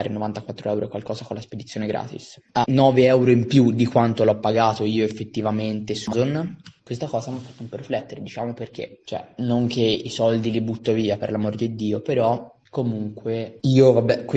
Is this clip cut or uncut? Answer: cut